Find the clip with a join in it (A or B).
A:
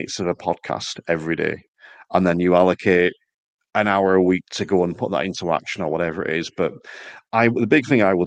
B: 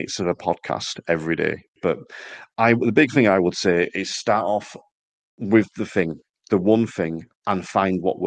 B